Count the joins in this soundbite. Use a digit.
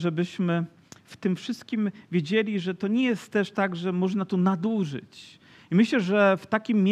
1